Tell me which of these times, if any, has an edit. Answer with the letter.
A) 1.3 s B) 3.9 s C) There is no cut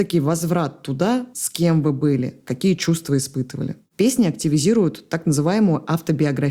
A